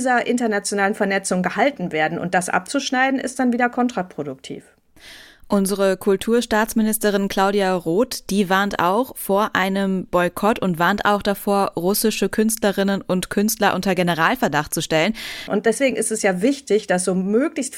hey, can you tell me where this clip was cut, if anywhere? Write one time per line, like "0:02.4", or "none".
0:15.5